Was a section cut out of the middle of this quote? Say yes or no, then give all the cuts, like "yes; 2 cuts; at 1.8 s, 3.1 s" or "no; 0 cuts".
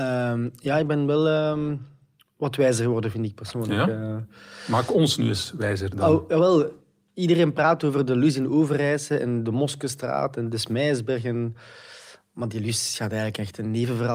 no; 0 cuts